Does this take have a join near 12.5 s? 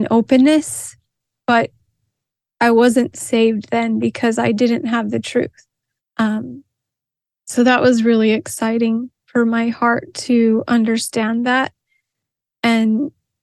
no; 1 cut; at 6.0 s

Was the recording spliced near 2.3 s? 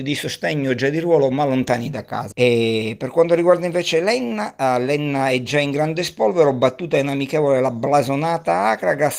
yes; 1 cut; at 2.3 s

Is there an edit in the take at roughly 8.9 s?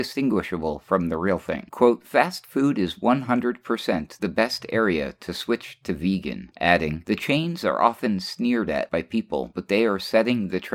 no; 2 cuts; at 1.7 s, 6.5 s

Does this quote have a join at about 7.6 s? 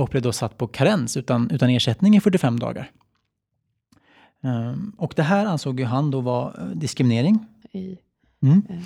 yes; 1 cut; at 7.6 s

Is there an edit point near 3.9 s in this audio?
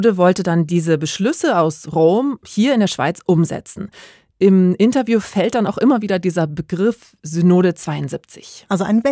no; 0 cuts

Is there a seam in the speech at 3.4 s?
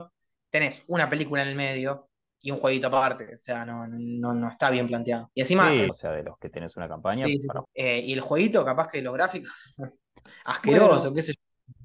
no; 2 cuts; at 5.9 s, 7.6 s

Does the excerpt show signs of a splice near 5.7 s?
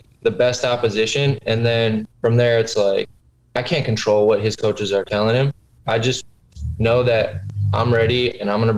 no; 1 cut; at 2.1 s

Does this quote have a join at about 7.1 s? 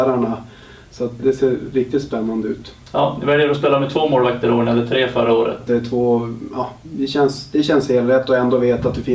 no; 2 cuts; at 1.2 s, 5.7 s

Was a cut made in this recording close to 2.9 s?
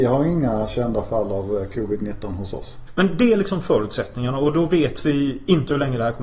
yes; 1 cut; at 2.9 s

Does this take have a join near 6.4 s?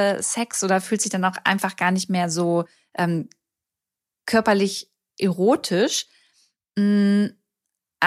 no; 0 cuts

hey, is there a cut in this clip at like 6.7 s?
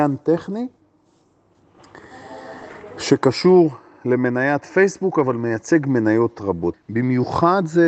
yes; 1 cut; at 6.7 s

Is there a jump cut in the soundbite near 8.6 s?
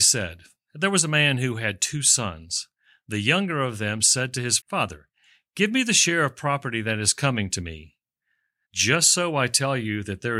yes; 2 cuts; at 4.6 s, 8.6 s

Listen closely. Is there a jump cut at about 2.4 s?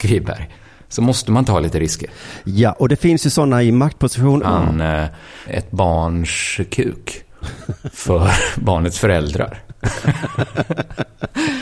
no; 2 cuts; at 4.4 s, 5.5 s

